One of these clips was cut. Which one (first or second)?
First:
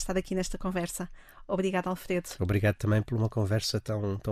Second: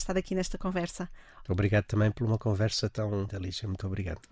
second